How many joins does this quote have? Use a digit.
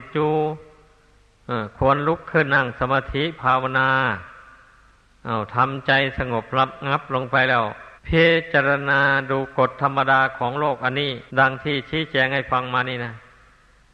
3